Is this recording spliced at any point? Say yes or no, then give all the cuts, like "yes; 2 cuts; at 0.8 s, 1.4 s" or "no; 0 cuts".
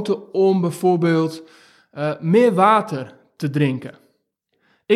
no; 0 cuts